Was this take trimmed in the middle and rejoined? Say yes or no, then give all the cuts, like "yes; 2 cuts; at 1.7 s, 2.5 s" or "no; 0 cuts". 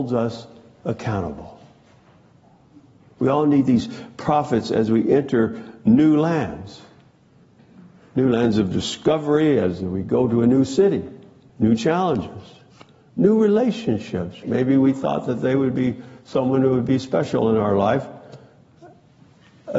yes; 2 cuts; at 11.5 s, 14.4 s